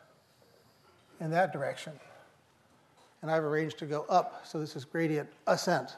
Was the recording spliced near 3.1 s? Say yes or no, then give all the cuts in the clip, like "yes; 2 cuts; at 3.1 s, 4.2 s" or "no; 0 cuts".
yes; 1 cut; at 3.1 s